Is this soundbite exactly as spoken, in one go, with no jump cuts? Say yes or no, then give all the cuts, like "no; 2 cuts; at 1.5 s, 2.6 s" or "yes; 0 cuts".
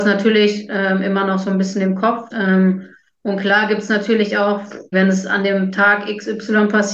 no; 2 cuts; at 2.3 s, 4.9 s